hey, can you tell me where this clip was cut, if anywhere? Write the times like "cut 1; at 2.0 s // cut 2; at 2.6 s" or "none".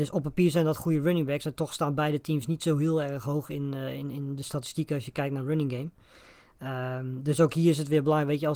none